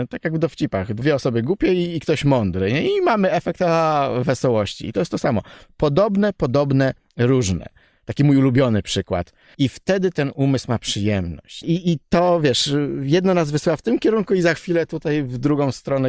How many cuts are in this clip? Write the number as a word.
two